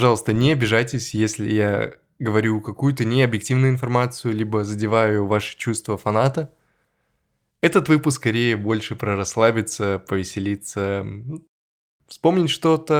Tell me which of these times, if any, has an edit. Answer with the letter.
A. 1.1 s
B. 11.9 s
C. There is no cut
C